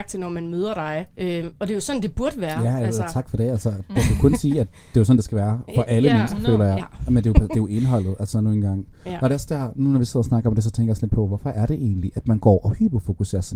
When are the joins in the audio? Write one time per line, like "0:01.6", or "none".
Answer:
0:01.1
0:06.8